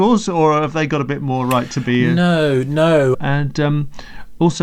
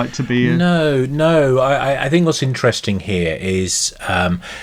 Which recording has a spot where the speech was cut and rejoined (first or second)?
first